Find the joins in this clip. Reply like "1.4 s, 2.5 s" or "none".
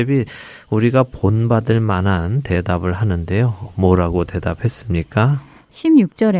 none

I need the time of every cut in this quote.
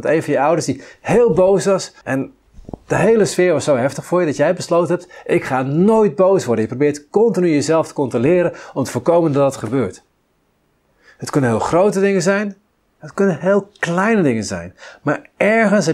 2.0 s

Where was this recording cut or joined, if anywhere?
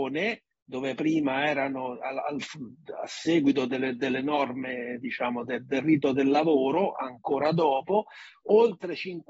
none

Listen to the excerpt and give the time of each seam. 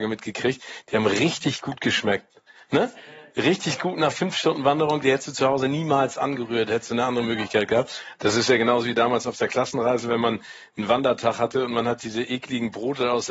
8.1 s

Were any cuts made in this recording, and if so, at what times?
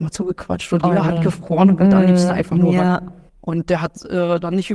3.3 s

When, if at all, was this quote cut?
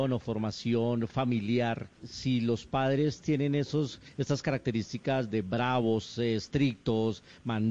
2.0 s

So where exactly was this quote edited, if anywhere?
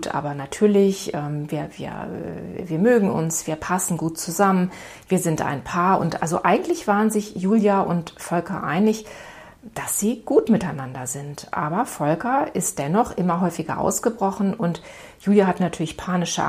none

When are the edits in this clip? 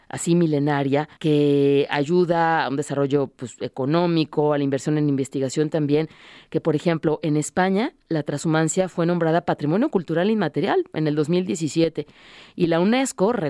1.2 s

